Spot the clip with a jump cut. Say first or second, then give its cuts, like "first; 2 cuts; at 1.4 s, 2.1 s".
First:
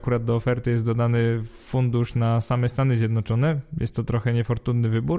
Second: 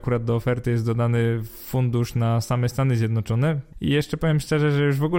second; 1 cut; at 3.7 s